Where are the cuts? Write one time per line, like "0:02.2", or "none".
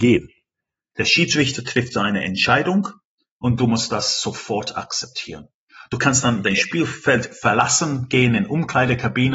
0:00.9

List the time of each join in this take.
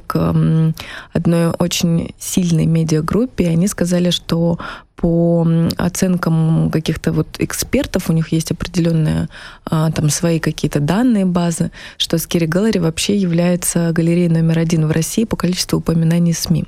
none

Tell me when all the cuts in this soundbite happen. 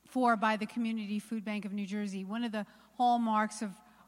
none

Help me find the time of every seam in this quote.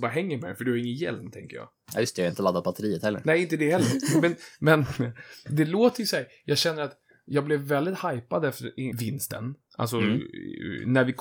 0:08.9

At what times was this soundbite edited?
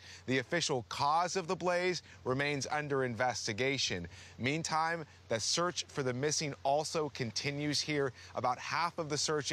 none

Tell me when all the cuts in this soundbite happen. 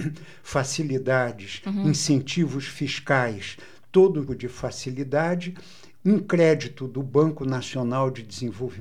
0:04.3

